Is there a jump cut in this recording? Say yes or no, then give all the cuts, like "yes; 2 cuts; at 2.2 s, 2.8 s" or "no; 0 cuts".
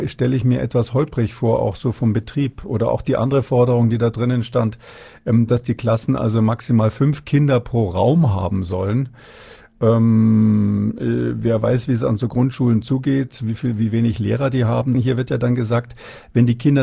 yes; 1 cut; at 14.9 s